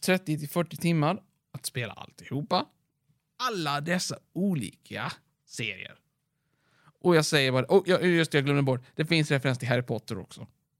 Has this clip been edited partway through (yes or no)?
yes